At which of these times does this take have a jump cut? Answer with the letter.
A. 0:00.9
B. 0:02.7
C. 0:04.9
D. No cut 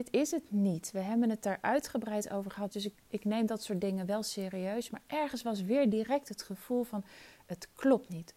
B